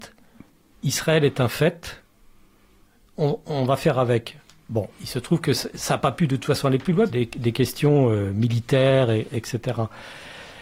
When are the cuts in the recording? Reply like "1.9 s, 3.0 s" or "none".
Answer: 7.1 s